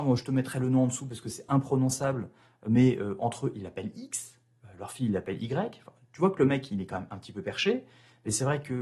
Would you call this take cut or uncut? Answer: uncut